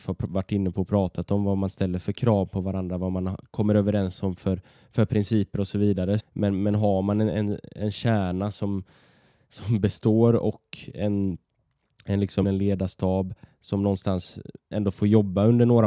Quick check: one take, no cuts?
no; 2 cuts; at 6.2 s, 12.4 s

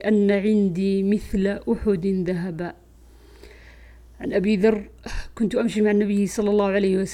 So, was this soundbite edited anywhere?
no; 0 cuts

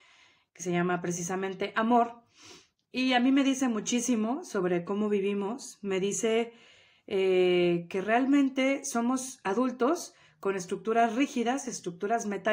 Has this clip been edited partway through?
no; 0 cuts

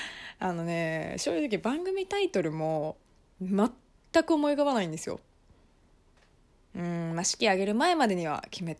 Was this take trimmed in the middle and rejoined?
no; 0 cuts

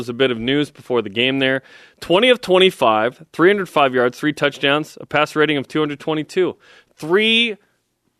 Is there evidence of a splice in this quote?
no; 0 cuts

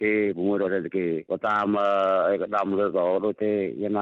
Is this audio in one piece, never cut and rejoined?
no; 1 cut; at 2.9 s

